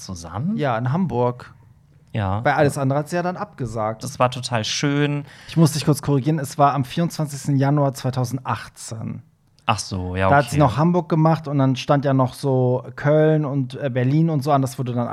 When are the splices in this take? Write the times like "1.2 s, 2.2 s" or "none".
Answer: 4.0 s

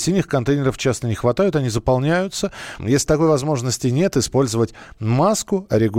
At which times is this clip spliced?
2.8 s

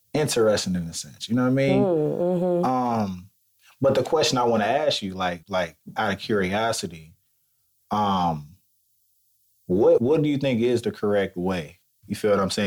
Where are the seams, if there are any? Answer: 5.4 s, 10.0 s

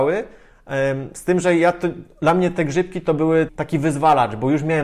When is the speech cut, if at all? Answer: 3.5 s

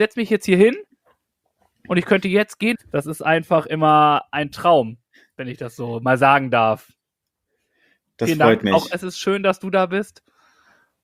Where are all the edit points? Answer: 2.7 s

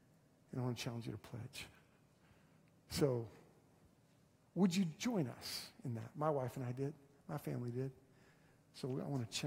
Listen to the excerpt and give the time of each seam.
none

